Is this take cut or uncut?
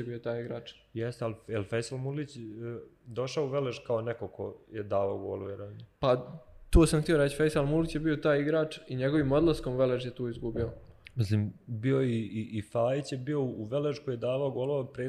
uncut